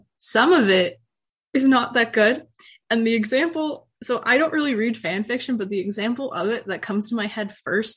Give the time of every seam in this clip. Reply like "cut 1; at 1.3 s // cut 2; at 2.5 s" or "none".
none

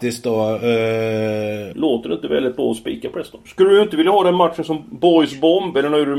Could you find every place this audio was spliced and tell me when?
cut 1; at 1.7 s // cut 2; at 3.5 s

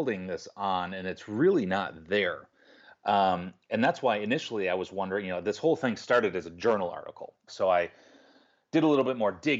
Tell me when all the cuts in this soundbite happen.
cut 1; at 7.5 s

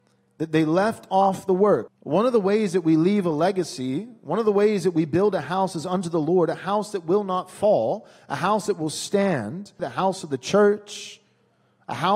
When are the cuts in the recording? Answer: cut 1; at 1.9 s // cut 2; at 9.8 s

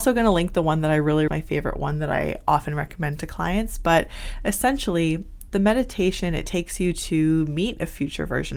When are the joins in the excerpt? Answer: cut 1; at 1.3 s

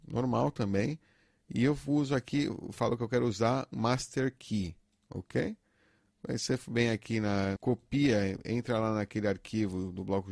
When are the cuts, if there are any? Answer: cut 1; at 3.7 s // cut 2; at 7.6 s

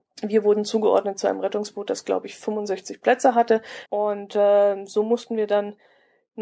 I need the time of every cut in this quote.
cut 1; at 3.9 s

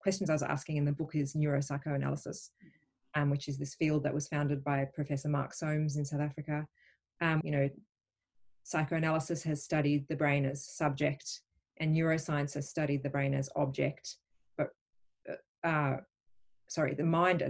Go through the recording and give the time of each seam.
cut 1; at 7.4 s

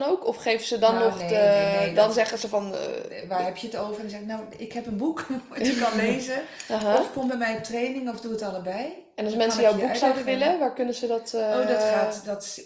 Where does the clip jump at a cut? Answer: none

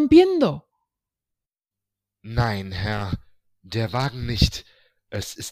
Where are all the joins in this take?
none

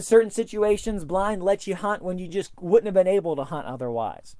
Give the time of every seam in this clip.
none

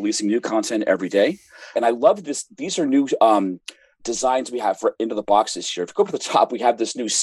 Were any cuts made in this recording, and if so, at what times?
cut 1; at 1.7 s // cut 2; at 4.0 s

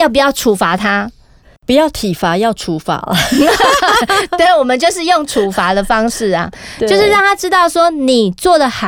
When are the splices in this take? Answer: cut 1; at 1.4 s

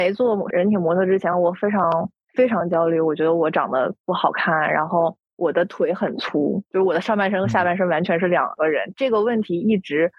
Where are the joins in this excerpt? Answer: none

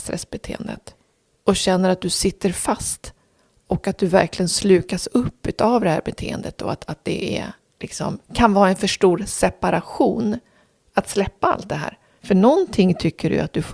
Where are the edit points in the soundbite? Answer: cut 1; at 8.2 s // cut 2; at 12.2 s

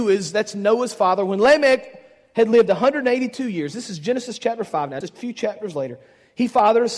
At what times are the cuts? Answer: cut 1; at 5.0 s

